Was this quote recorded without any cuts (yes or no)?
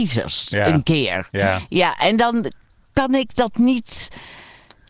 yes